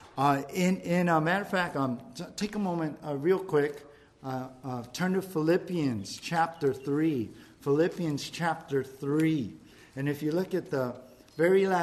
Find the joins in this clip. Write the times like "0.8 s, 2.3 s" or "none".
none